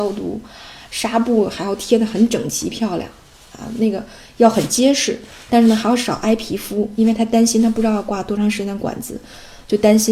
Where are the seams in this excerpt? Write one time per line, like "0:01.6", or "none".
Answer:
none